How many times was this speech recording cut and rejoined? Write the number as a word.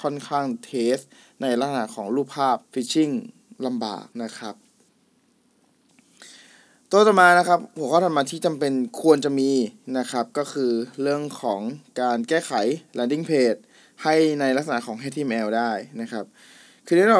two